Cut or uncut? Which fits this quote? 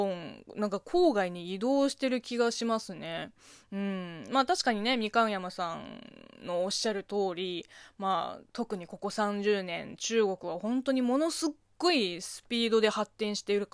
uncut